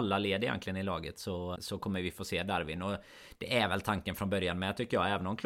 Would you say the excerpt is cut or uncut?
cut